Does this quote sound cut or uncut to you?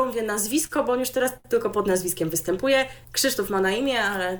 cut